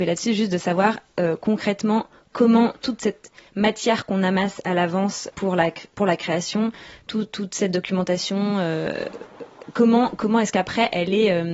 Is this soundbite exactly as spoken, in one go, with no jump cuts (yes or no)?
no